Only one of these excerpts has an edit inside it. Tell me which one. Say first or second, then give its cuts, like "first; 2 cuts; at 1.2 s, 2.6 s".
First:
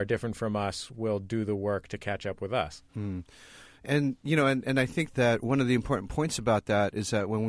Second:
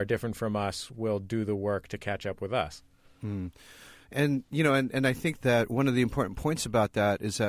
first; 1 cut; at 2.9 s